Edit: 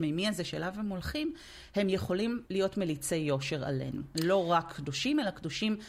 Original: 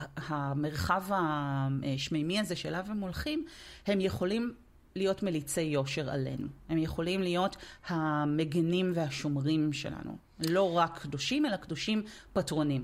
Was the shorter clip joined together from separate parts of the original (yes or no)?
yes